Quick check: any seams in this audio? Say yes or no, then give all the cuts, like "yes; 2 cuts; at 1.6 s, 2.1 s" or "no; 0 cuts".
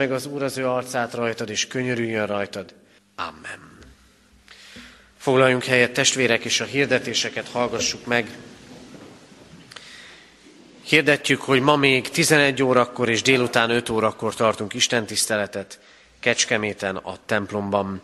yes; 1 cut; at 3.0 s